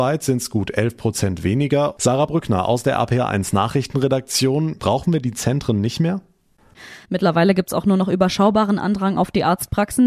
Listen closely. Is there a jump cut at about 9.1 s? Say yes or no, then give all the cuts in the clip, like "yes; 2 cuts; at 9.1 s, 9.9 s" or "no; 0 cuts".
no; 3 cuts; at 2.0 s, 4.8 s, 7.0 s